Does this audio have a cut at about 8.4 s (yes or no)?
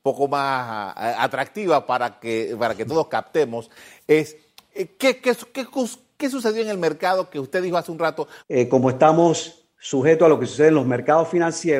yes